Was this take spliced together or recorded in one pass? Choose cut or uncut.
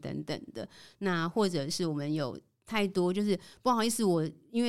uncut